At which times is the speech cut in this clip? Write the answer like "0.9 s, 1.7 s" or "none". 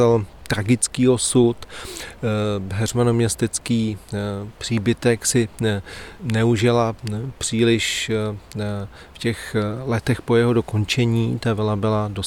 none